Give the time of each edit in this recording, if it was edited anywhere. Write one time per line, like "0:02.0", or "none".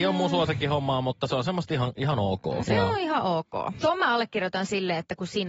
0:02.6
0:03.8